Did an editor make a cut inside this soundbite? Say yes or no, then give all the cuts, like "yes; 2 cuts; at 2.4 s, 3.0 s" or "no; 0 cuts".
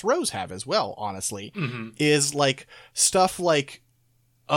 no; 0 cuts